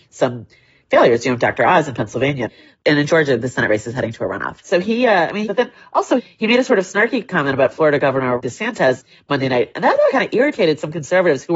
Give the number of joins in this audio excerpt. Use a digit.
2